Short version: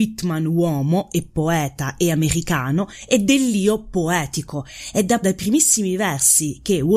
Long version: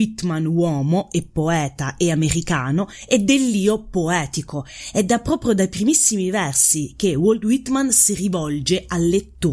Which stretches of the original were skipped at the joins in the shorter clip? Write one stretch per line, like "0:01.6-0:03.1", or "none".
0:05.2-0:05.6

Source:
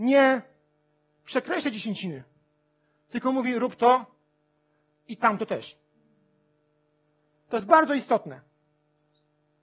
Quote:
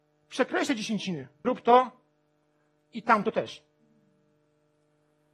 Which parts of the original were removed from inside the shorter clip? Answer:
0:02.4-0:03.6

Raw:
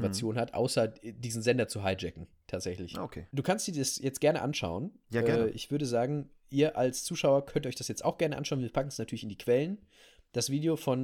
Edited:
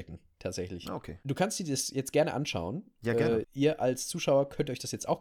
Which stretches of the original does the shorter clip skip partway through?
0:05.5-0:06.4

